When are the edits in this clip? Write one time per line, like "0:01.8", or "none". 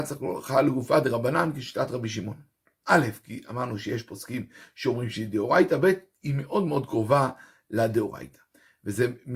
0:02.8